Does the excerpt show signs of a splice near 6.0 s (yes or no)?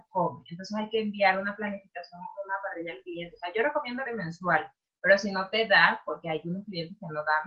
no